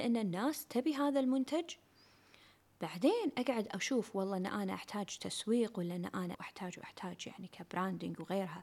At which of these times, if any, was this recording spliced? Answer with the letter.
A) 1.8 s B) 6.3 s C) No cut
B